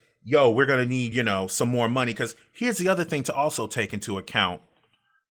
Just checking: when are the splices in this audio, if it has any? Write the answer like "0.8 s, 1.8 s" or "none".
none